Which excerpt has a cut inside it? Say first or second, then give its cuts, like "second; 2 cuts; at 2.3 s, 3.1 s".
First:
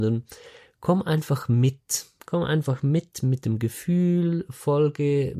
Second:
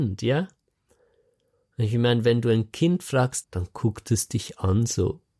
second; 1 cut; at 3.4 s